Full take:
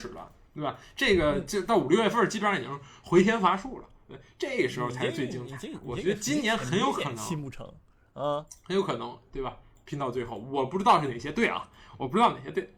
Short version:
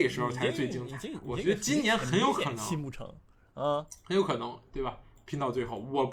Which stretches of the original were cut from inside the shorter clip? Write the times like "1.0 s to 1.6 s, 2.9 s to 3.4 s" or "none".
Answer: none